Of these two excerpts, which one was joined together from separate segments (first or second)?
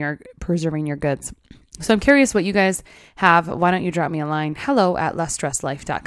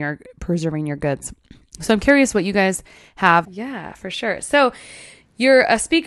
second